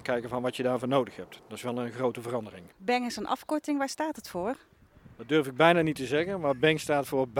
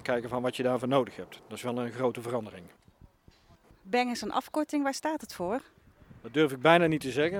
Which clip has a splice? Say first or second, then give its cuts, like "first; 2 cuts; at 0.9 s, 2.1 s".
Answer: first; 1 cut; at 2.7 s